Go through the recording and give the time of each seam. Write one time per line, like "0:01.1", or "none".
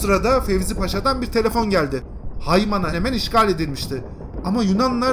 0:02.9

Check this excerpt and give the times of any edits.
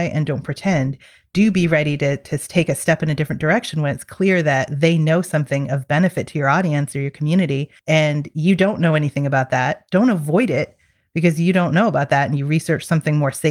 0:07.8

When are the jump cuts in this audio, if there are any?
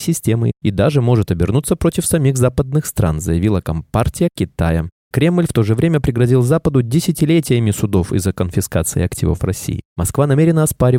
none

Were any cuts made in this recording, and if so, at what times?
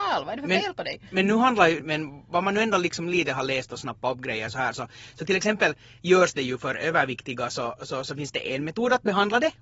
0:01.8

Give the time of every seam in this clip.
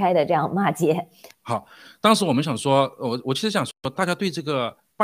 0:01.3
0:03.9

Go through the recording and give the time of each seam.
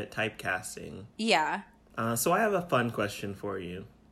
0:01.1

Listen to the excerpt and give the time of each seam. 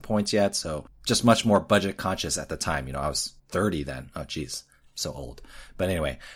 0:03.4

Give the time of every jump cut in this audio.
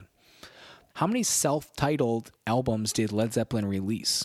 0:00.9
0:02.4

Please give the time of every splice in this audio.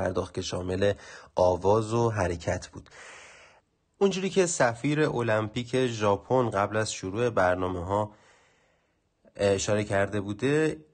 none

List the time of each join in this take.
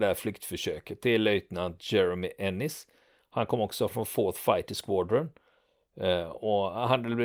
none

